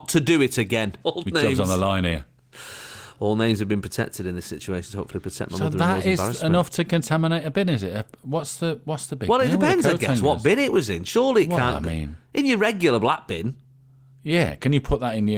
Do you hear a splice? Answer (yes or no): yes